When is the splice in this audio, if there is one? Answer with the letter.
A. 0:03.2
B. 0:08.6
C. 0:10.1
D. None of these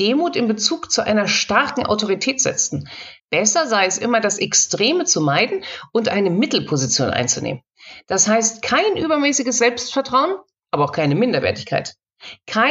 A